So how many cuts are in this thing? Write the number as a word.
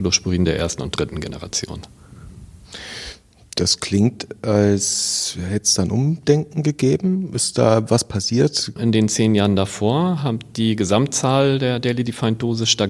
one